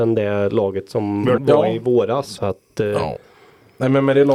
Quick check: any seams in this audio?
yes; 2 cuts; at 1.4 s, 2.4 s

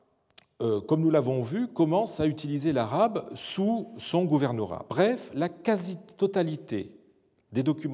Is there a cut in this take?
no; 0 cuts

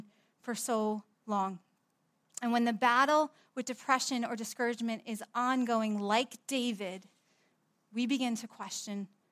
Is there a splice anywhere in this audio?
no; 0 cuts

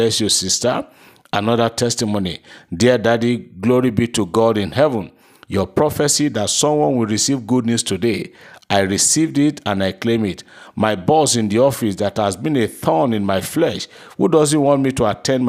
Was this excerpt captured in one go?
yes; 0 cuts

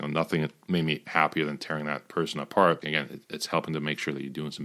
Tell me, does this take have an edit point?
yes; 1 cut; at 2.8 s

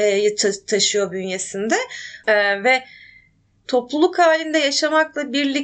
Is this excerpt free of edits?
no; 1 cut; at 2.2 s

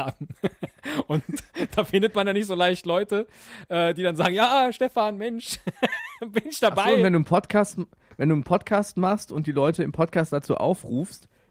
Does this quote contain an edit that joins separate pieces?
no; 0 cuts

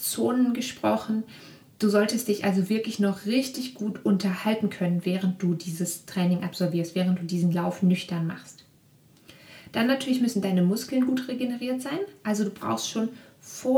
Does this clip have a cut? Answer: no; 0 cuts

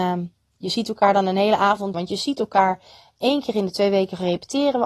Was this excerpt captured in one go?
no; 1 cut; at 1.9 s

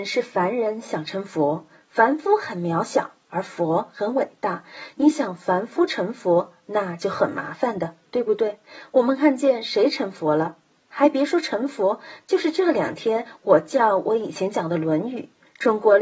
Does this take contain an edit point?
no; 0 cuts

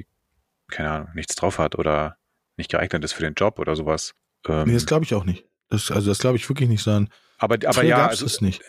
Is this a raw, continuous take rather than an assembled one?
yes; 0 cuts

